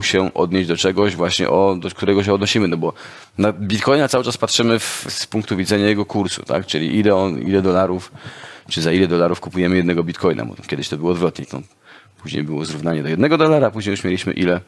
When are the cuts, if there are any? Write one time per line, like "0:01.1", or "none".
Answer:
0:05.1
0:11.4